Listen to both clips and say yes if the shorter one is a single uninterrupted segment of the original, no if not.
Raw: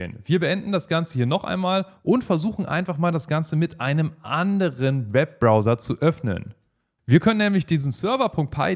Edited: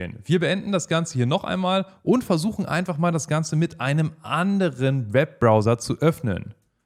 yes